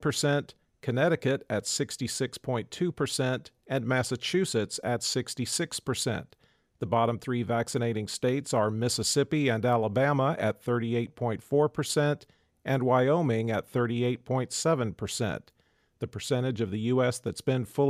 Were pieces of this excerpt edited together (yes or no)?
no